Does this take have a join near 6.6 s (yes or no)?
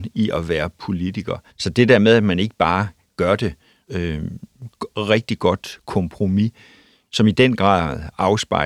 no